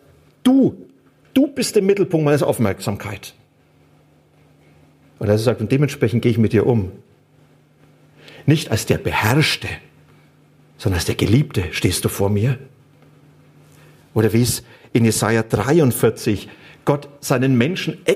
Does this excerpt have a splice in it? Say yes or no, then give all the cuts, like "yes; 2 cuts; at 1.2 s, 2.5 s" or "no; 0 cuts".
no; 0 cuts